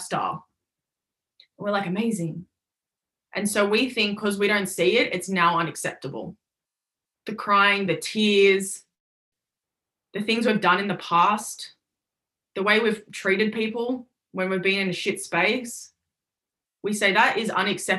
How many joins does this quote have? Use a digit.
2